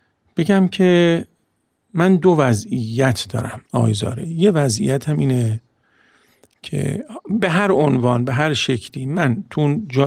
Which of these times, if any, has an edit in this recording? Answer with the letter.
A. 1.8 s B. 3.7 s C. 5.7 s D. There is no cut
B